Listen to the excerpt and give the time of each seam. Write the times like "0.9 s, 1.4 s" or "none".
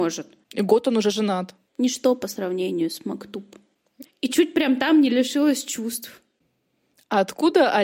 1.7 s, 4.0 s